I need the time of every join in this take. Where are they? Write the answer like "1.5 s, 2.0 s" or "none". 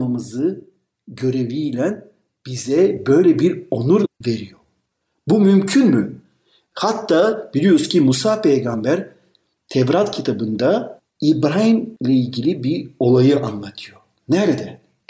none